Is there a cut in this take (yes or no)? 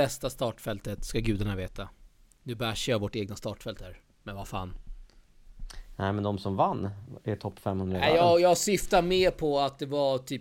no